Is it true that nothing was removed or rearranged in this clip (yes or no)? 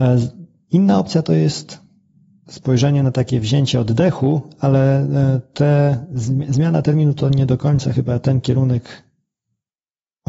yes